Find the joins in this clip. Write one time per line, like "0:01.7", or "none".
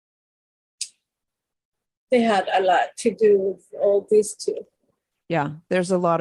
none